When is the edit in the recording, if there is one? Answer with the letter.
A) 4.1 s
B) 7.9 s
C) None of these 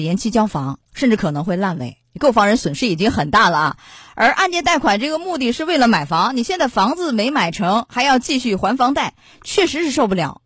C